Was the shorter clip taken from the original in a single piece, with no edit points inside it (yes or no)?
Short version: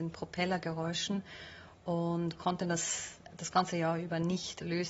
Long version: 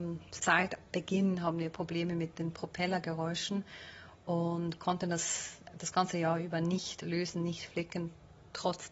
yes